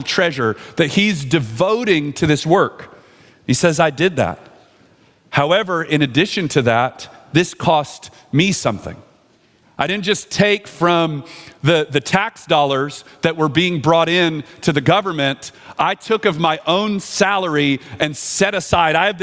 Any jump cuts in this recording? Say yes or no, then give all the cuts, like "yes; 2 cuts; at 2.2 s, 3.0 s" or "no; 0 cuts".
no; 0 cuts